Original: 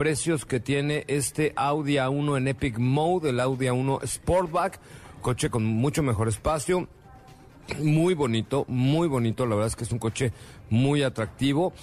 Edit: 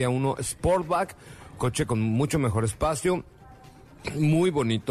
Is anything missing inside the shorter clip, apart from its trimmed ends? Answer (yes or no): no